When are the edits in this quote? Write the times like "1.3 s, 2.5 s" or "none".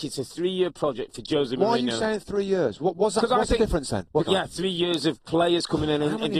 4.2 s

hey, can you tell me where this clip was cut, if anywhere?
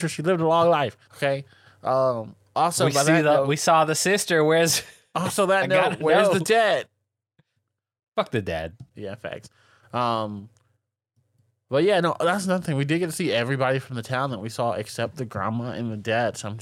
1.0 s

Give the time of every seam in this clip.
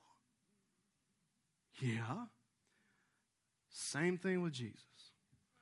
none

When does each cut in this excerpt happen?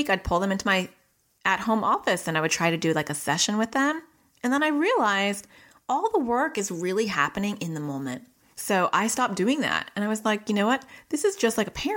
8.5 s

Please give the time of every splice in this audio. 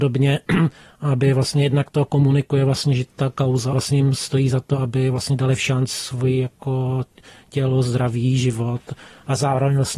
3.7 s

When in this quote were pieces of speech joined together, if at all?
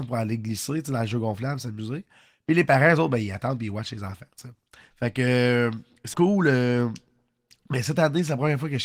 4.9 s, 6.1 s

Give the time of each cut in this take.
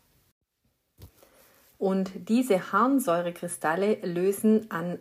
1.7 s

